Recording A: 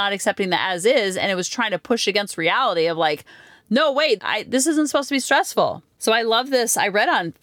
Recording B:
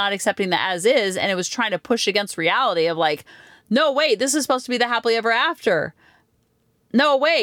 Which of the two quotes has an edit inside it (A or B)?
A